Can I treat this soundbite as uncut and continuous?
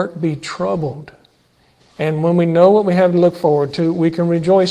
no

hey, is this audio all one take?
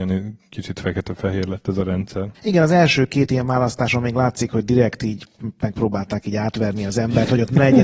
no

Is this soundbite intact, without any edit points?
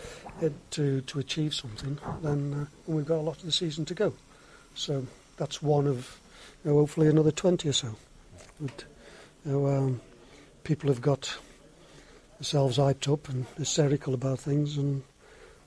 yes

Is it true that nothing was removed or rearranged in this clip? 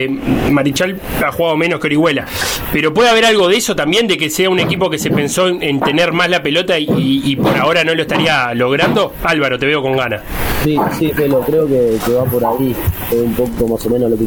yes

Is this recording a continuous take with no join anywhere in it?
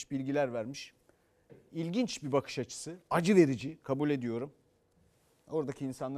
yes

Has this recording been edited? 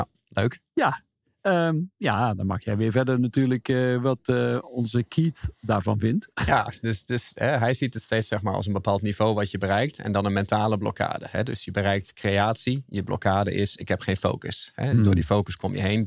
no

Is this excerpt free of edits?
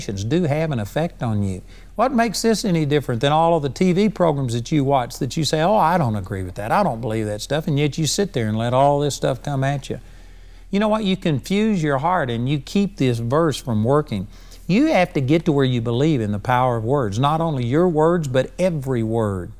no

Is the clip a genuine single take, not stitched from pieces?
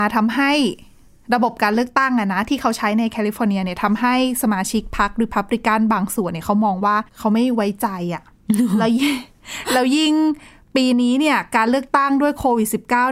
no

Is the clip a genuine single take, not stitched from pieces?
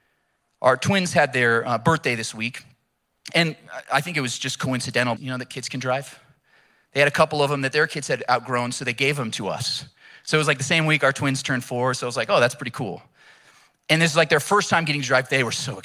no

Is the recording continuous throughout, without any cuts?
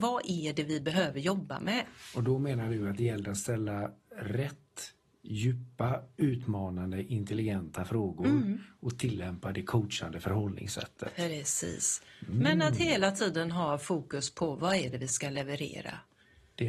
yes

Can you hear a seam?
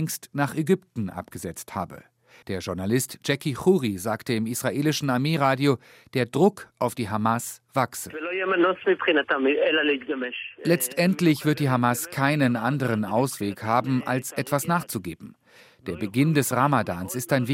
yes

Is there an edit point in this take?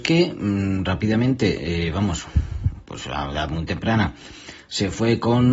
no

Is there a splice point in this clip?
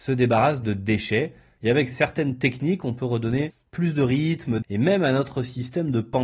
yes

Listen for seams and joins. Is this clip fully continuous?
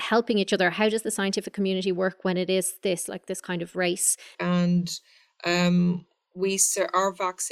no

